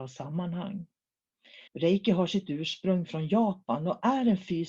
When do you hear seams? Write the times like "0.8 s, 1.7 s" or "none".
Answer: 1.7 s